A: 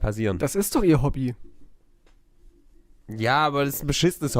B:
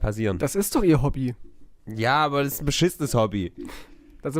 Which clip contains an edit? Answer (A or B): B